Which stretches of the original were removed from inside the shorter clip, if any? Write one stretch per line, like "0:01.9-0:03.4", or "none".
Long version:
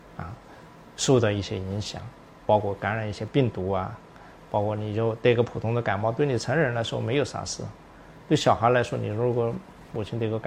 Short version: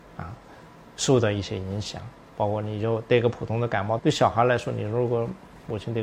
0:02.3-0:04.5
0:06.1-0:08.2